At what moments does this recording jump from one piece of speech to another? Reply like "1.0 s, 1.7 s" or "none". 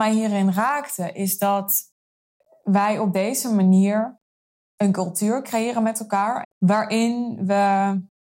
6.4 s

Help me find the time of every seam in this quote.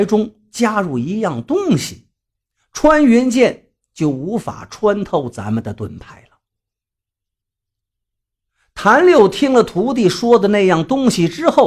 none

